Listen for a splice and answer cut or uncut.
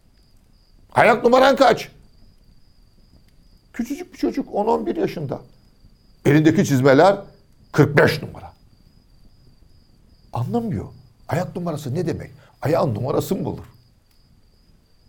uncut